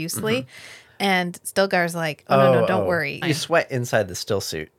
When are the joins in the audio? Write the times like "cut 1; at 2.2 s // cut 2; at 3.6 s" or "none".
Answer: cut 1; at 3.2 s